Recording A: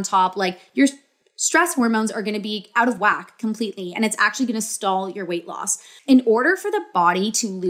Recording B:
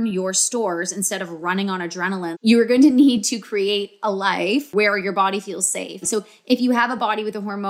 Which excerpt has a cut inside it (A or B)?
B